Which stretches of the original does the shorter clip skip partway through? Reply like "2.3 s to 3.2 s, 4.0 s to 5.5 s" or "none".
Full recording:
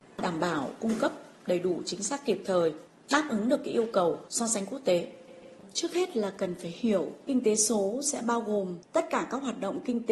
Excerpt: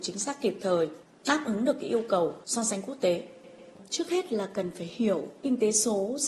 none